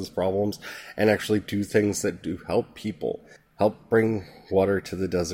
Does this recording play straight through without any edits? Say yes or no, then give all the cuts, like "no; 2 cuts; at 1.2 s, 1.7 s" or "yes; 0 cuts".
yes; 0 cuts